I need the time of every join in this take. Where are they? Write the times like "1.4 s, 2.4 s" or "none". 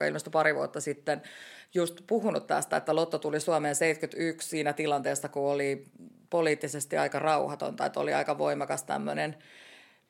none